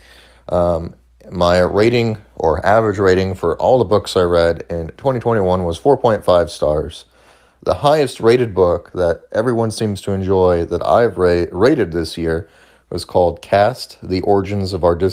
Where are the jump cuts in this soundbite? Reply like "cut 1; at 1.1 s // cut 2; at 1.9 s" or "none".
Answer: none